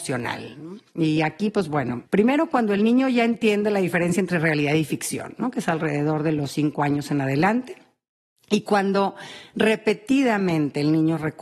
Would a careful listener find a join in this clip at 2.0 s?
yes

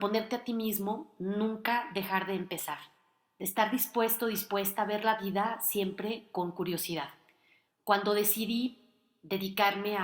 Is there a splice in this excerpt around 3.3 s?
no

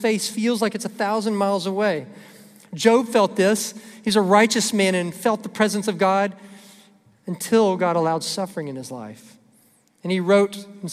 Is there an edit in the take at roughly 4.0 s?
no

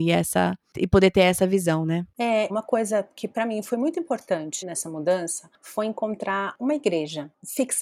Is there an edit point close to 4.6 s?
yes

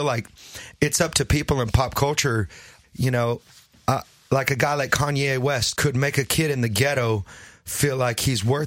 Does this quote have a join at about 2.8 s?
yes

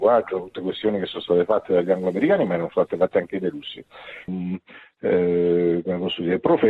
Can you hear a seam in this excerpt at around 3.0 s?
no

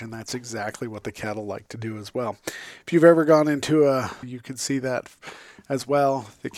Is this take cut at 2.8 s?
no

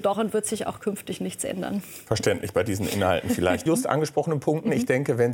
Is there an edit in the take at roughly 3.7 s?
yes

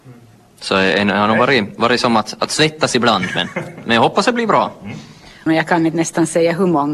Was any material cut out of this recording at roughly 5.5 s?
yes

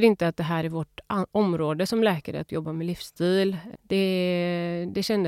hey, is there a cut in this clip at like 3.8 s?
yes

